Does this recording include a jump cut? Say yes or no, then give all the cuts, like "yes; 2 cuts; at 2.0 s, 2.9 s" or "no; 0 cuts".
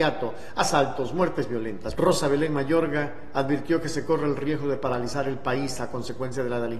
yes; 1 cut; at 1.9 s